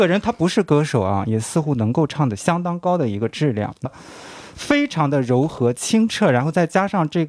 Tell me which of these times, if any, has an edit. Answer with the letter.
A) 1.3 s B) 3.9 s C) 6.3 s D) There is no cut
B